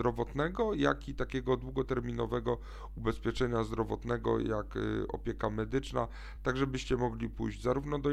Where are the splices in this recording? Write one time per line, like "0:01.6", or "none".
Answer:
none